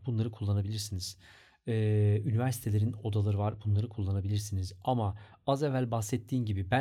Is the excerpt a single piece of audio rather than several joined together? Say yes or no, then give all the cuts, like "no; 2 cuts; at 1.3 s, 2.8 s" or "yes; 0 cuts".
yes; 0 cuts